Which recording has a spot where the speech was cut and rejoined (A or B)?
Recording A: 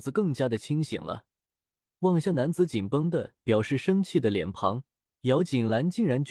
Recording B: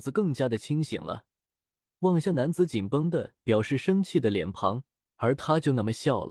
B